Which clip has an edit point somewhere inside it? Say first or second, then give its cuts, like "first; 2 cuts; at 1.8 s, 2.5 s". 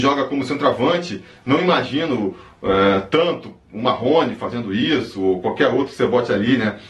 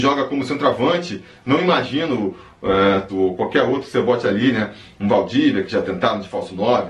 second; 1 cut; at 3.1 s